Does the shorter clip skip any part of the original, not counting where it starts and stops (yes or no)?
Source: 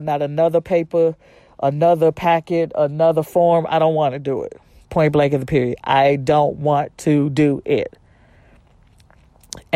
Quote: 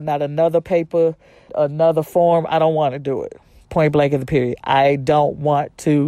yes